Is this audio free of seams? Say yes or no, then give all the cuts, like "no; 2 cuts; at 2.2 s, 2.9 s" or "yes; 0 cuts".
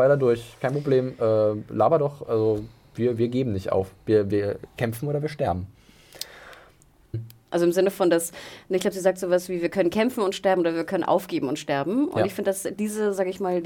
no; 1 cut; at 7.1 s